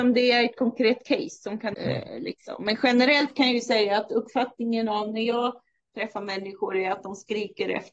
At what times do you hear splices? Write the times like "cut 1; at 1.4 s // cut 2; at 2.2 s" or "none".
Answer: cut 1; at 1.7 s